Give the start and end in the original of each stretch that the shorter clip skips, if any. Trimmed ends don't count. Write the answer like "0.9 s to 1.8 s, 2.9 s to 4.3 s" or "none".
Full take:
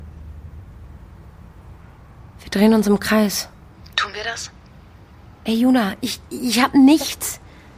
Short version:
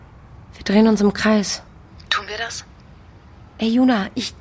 none